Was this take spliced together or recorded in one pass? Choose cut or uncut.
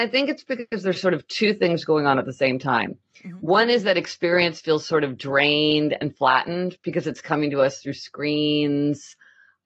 uncut